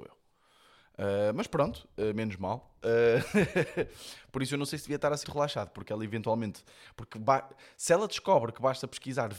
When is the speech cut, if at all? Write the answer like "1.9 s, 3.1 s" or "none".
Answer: 5.2 s